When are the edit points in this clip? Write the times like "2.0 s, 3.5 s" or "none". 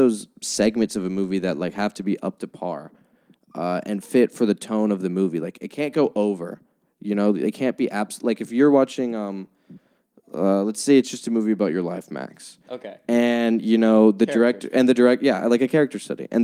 none